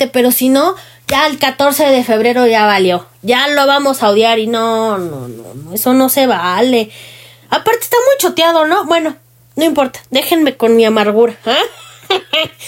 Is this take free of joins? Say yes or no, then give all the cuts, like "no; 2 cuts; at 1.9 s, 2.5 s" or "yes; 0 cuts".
yes; 0 cuts